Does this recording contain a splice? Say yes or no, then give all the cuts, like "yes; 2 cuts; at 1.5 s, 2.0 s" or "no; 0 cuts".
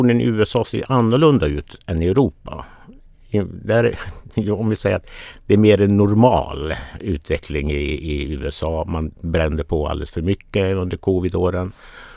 no; 0 cuts